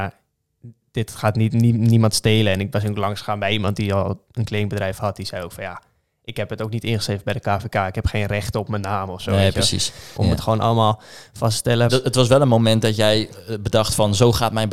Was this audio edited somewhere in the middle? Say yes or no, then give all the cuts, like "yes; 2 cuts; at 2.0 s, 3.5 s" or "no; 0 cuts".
yes; 2 cuts; at 10.2 s, 11.9 s